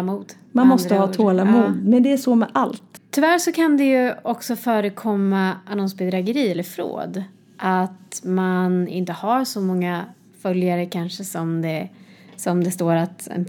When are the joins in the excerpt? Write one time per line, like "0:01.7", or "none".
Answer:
0:03.0